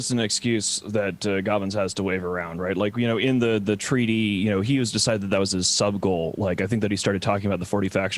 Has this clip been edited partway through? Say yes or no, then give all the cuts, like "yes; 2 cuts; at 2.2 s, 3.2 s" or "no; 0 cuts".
no; 0 cuts